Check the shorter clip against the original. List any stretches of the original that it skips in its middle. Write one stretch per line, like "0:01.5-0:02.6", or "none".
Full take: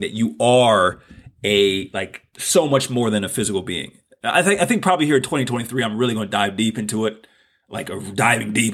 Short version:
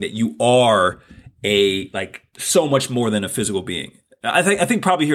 none